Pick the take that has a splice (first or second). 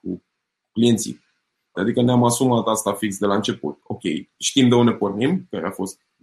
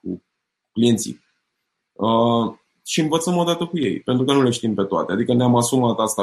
first